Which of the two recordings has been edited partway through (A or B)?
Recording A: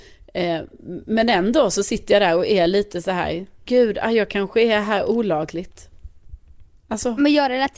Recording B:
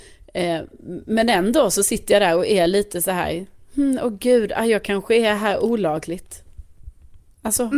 A